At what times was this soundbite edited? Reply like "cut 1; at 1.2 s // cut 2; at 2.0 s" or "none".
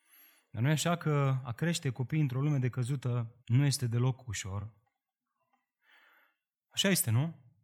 cut 1; at 3.4 s